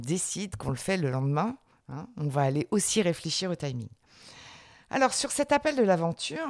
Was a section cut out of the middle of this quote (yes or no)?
no